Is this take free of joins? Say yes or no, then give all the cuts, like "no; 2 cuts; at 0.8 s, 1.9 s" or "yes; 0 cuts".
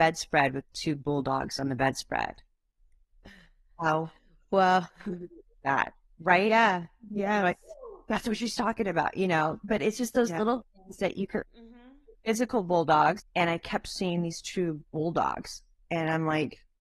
no; 2 cuts; at 11.4 s, 13.2 s